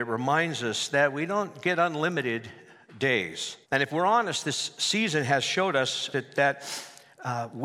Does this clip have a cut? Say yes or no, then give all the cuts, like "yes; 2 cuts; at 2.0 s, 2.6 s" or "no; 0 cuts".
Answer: yes; 2 cuts; at 3.6 s, 6.1 s